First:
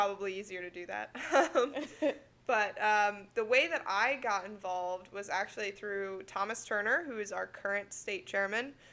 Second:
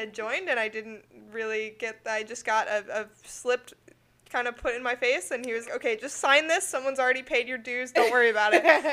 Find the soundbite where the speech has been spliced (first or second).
second